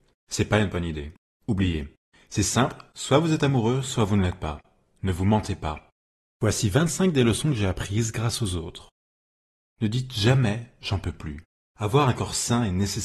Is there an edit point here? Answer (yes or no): yes